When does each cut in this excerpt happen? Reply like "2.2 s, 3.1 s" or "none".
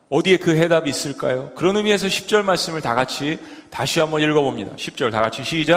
none